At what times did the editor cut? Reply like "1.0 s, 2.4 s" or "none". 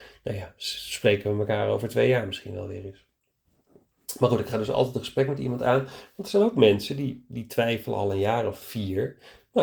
none